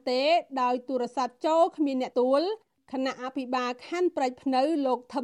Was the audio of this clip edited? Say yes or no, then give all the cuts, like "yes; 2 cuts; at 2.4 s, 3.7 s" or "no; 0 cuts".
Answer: yes; 1 cut; at 2.1 s